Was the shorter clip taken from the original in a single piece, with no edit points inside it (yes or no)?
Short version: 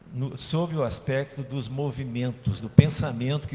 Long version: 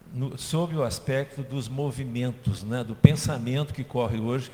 no